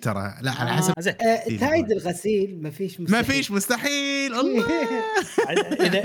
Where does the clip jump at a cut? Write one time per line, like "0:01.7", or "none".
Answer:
0:00.9

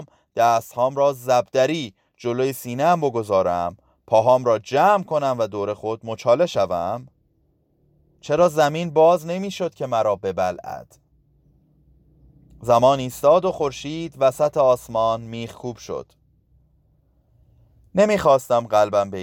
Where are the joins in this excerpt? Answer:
0:08.2

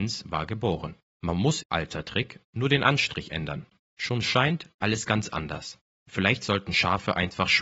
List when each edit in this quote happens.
0:01.6

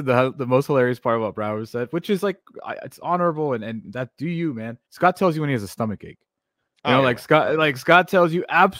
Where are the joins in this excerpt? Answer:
0:04.9

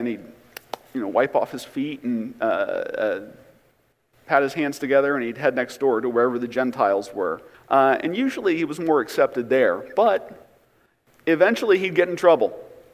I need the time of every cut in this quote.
0:07.5

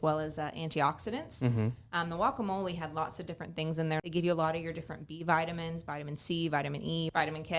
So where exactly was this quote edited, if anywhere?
0:04.0

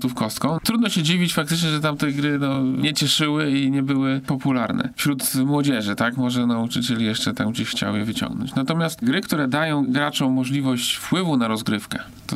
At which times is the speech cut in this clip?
none

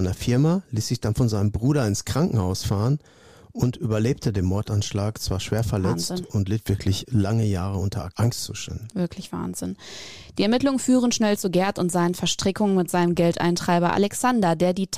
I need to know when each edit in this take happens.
none

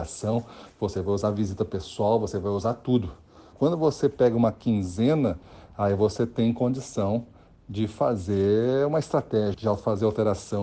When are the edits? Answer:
0:03.5
0:09.5

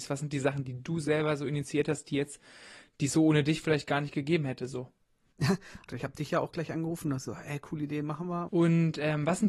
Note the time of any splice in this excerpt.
0:05.9
0:08.5

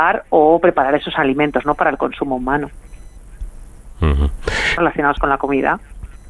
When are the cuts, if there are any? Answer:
0:04.8

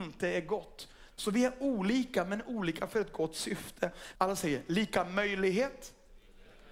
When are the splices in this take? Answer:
0:01.1
0:04.1

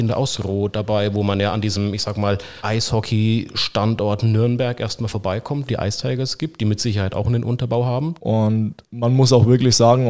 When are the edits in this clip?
0:05.7
0:08.2

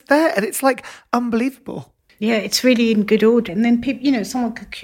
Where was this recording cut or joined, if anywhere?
0:02.1
0:03.5

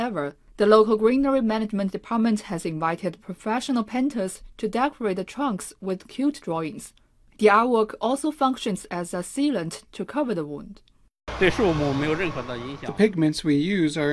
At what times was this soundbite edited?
none

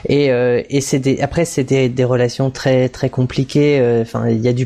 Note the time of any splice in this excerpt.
none

